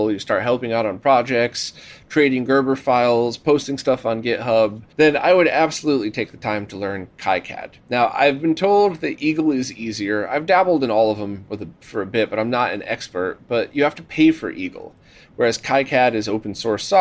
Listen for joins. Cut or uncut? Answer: cut